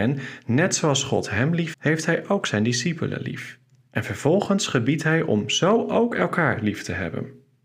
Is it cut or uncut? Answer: cut